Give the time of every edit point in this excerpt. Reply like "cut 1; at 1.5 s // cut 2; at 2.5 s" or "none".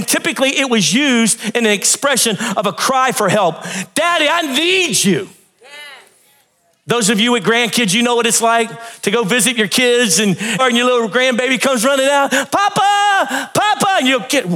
cut 1; at 10.6 s